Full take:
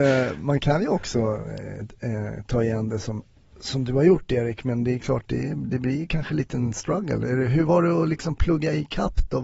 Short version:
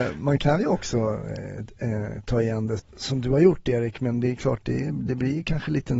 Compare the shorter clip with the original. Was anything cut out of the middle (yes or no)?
yes